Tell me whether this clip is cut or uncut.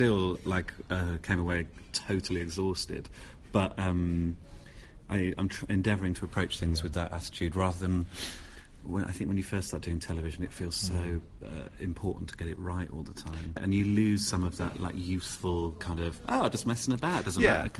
uncut